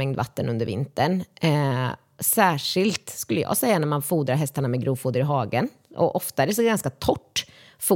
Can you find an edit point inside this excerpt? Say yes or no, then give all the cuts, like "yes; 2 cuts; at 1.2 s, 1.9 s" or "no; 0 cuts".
no; 0 cuts